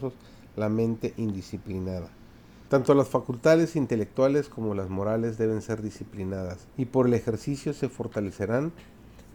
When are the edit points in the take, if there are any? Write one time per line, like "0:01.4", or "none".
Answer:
0:02.7
0:06.7